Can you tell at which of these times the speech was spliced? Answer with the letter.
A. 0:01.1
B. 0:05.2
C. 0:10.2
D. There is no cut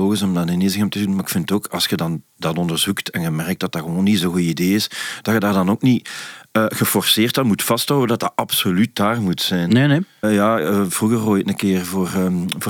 C